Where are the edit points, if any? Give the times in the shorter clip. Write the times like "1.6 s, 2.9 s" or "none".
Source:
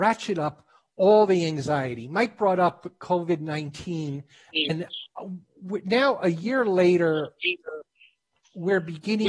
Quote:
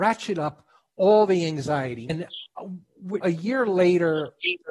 2.1 s, 3.2 s